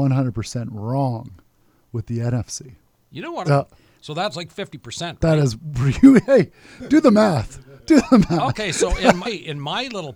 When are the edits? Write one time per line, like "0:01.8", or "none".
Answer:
0:03.4
0:09.2

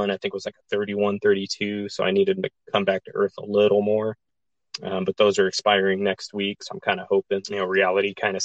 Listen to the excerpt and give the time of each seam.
0:07.4

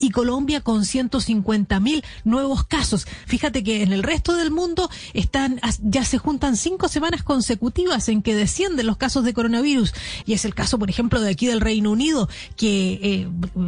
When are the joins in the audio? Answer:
0:03.2
0:10.2

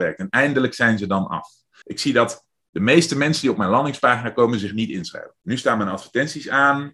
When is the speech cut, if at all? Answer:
0:01.8
0:05.4

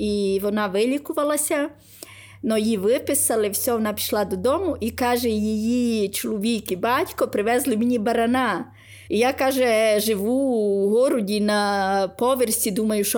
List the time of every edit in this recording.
0:09.1

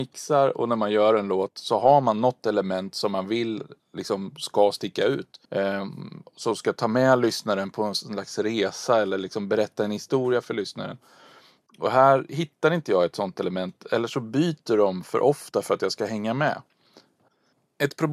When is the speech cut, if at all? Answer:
0:05.5

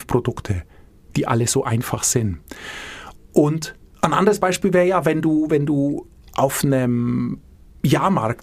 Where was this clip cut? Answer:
none

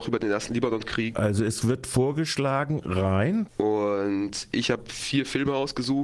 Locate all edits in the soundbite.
0:01.1
0:03.5

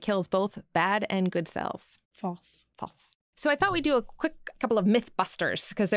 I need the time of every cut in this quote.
0:03.2

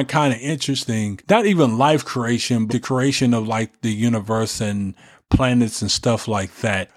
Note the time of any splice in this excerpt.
0:01.2
0:02.7

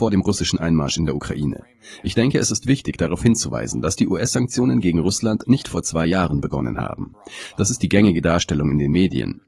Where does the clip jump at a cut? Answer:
none

